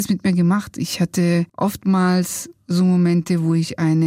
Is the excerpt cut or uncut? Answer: cut